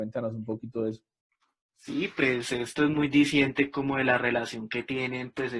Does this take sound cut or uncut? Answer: uncut